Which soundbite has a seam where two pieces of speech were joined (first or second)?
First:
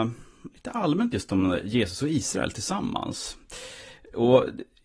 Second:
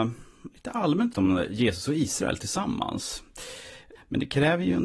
second